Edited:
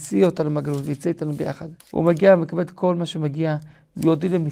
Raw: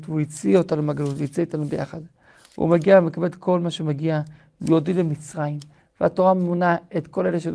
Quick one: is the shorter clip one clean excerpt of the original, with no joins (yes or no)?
no